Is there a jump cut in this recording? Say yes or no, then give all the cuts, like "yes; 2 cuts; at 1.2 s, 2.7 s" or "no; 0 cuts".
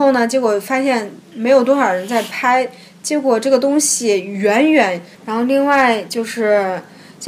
yes; 1 cut; at 5.1 s